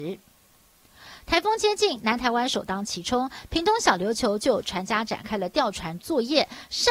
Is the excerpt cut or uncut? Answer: uncut